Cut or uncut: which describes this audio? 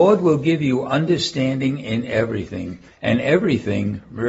uncut